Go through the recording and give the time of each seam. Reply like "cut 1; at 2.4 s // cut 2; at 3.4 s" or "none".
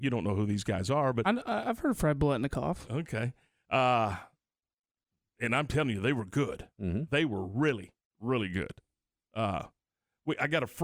none